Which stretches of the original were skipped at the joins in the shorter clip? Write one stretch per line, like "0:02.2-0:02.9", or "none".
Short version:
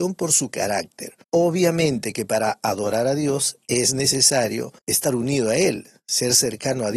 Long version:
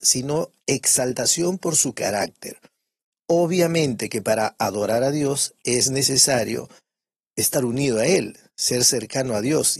0:02.7-0:03.2
0:06.7-0:07.3